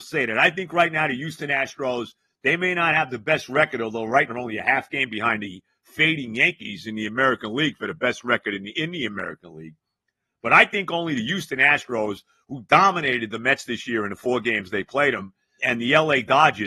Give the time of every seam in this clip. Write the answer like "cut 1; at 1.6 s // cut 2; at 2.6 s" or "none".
cut 1; at 4.3 s // cut 2; at 15.6 s